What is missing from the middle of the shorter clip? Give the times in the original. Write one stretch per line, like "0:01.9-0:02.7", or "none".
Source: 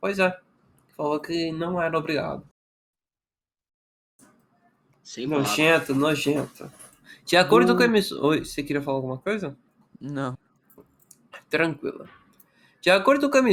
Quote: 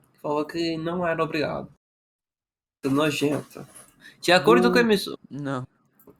0:03.6-0:05.9
0:08.2-0:09.8